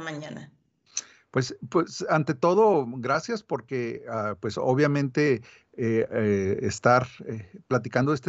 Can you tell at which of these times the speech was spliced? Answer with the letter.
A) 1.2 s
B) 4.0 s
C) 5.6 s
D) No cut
D